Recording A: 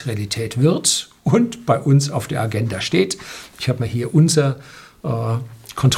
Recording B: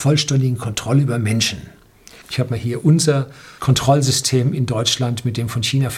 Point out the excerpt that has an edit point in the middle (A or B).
B